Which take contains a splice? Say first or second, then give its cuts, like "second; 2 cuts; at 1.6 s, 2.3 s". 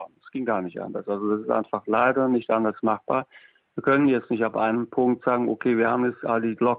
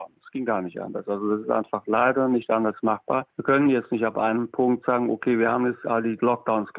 second; 1 cut; at 3.3 s